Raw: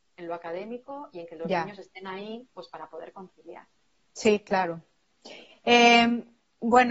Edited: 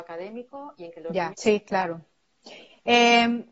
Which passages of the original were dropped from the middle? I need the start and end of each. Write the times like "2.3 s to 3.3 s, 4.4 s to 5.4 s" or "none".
1.7 s to 4.1 s